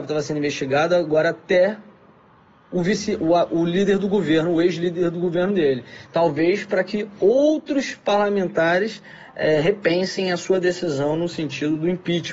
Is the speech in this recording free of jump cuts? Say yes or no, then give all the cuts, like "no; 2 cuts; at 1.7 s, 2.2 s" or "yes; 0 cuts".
no; 1 cut; at 6.1 s